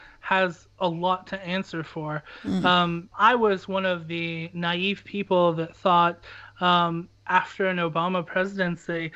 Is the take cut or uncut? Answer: cut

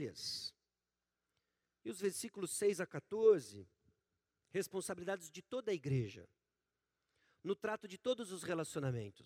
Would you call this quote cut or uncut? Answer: uncut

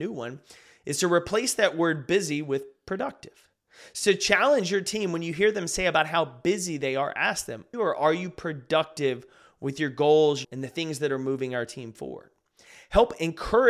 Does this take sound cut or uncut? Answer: cut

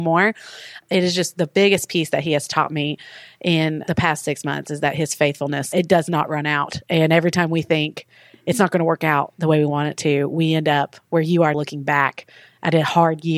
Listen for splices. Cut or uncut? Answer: cut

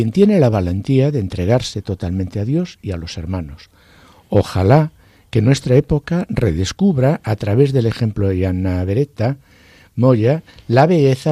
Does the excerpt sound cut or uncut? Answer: uncut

